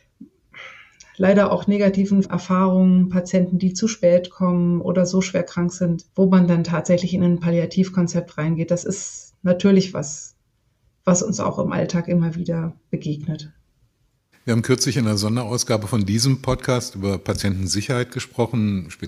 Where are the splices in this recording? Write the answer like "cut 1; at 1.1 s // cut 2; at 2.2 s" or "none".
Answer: cut 1; at 6.1 s

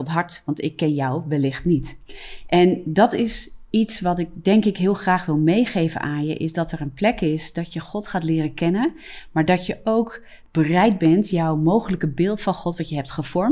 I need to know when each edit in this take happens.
none

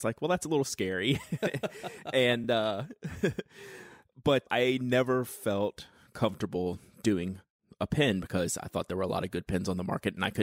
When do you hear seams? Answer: none

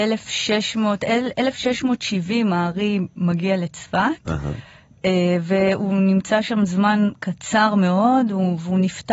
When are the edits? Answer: none

